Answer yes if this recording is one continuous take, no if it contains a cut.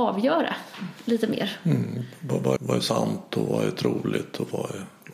no